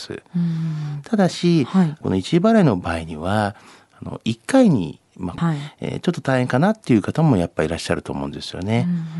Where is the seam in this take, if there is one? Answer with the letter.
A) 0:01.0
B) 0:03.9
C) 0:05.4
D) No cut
C